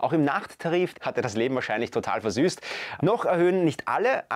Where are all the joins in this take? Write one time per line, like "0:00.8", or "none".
0:00.9
0:03.0